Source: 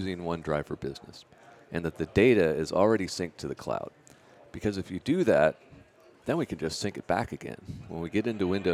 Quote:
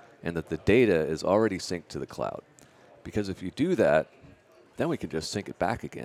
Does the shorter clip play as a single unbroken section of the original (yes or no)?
yes